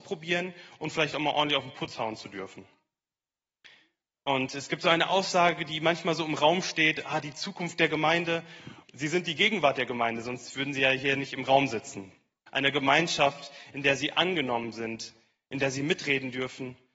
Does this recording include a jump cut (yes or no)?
yes